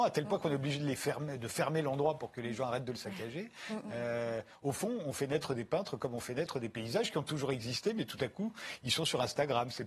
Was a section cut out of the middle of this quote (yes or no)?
no